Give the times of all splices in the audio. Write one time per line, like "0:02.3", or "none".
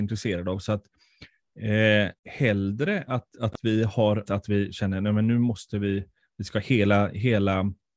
0:02.2
0:04.3